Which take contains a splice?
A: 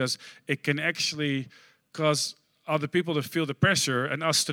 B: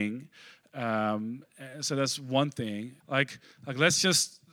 B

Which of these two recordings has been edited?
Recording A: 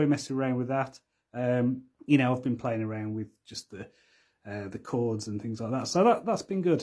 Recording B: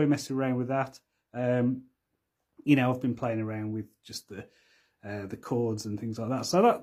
A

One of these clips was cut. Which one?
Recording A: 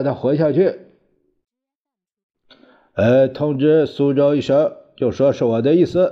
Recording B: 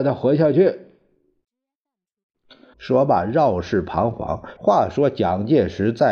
B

